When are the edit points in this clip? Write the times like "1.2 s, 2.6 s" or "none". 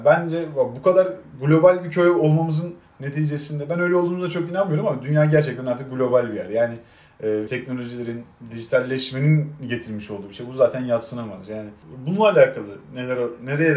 7.5 s